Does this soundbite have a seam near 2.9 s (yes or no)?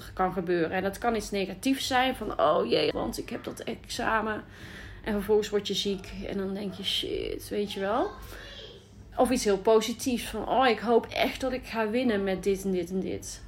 yes